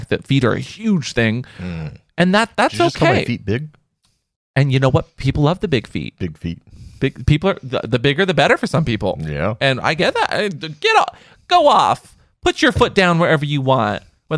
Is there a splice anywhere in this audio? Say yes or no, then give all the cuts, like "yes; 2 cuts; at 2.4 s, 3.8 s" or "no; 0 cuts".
no; 0 cuts